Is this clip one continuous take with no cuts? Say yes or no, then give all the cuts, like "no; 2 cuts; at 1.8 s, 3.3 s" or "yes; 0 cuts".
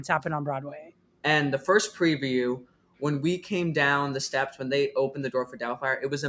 no; 1 cut; at 1.2 s